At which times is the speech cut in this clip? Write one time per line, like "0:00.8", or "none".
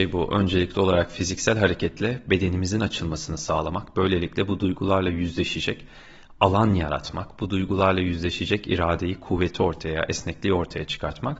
none